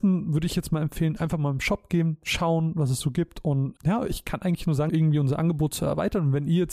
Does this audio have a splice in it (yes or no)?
yes